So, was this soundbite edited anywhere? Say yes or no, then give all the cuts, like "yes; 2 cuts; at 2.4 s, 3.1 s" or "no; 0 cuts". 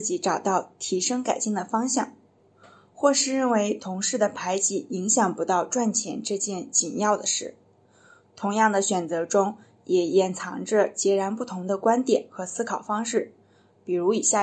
no; 0 cuts